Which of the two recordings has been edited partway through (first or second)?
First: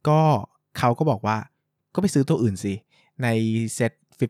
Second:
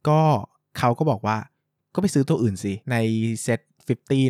second